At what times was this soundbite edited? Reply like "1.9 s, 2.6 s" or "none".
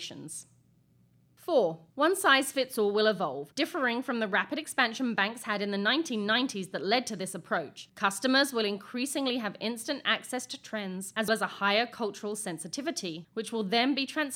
11.3 s